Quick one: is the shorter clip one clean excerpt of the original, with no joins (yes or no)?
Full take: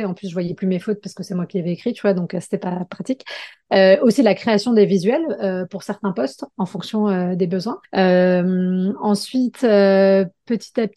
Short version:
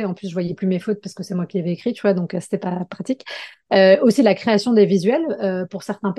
yes